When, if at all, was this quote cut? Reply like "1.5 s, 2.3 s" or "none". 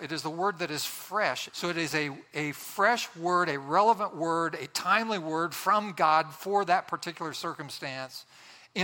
1.5 s